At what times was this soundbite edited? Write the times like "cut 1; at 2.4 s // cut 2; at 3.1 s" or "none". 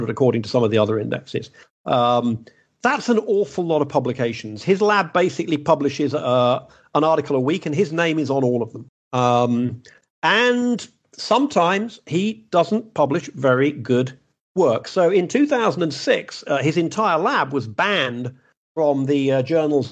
none